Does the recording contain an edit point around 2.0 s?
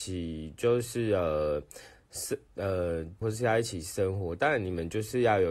no; 1 cut; at 3.2 s

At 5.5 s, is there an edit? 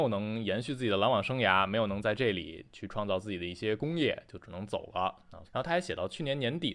yes; 1 cut; at 5.5 s

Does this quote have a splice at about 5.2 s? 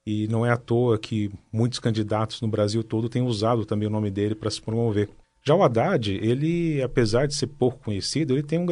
yes; 1 cut; at 5.2 s

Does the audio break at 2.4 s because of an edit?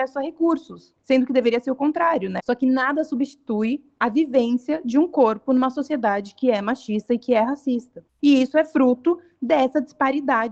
yes; 2 cuts; at 2.4 s, 8.2 s

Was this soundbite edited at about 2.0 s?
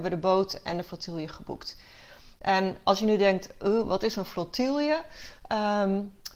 no; 0 cuts

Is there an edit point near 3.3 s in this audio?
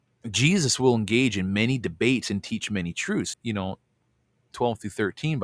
yes; 1 cut; at 3.3 s

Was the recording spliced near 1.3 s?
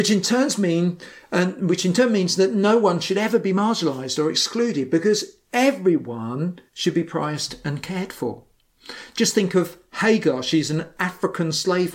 no; 1 cut; at 6.7 s

